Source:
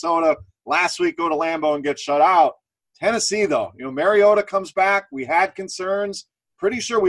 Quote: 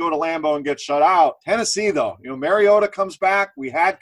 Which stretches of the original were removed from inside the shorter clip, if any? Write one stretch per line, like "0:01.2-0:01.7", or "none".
0:02.6-0:03.0